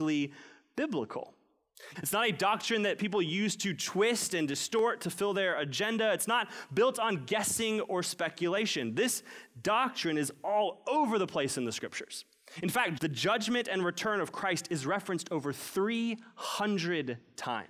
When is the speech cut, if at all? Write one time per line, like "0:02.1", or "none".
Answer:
0:01.9
0:13.0